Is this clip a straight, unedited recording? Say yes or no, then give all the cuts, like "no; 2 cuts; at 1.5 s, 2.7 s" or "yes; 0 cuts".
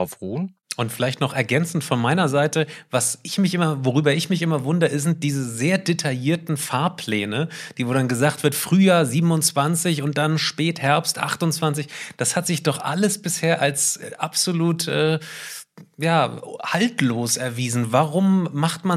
yes; 0 cuts